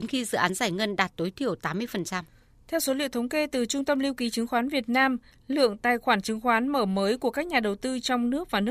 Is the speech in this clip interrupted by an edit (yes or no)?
yes